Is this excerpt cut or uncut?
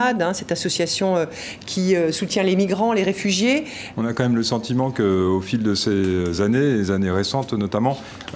cut